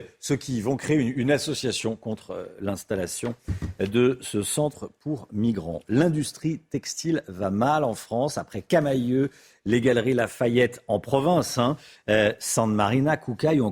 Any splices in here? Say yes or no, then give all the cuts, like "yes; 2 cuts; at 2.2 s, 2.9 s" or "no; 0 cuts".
no; 0 cuts